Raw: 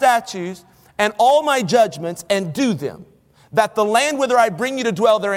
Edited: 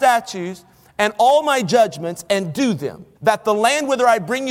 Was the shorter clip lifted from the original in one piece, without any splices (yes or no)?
no